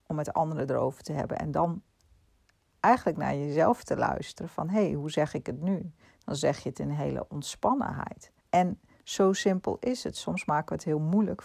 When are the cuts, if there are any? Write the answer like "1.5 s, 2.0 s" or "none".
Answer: 8.4 s